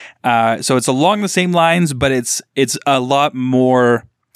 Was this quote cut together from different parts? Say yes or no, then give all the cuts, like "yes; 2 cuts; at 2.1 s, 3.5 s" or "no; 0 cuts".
no; 0 cuts